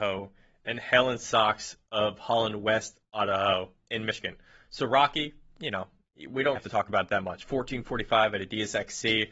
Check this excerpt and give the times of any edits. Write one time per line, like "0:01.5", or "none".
0:03.8
0:06.6